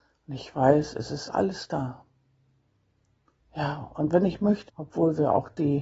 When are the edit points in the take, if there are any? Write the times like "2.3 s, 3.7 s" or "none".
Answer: 3.4 s, 4.7 s